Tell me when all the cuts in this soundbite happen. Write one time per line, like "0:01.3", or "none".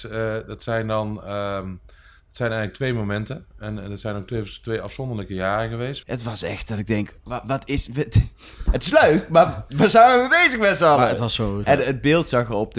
0:06.0
0:11.6